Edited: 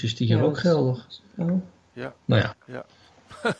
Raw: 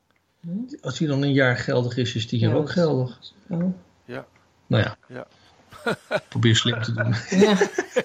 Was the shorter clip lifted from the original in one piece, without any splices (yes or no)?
no